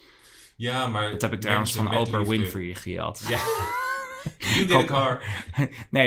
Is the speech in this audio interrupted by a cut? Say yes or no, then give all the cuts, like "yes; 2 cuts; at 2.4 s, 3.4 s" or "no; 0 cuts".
no; 0 cuts